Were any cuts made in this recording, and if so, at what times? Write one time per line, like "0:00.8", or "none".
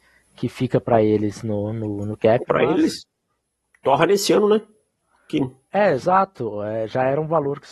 none